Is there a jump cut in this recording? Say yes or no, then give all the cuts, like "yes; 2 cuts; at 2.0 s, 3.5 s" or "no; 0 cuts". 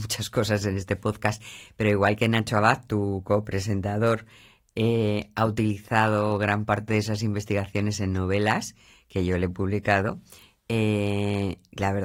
no; 0 cuts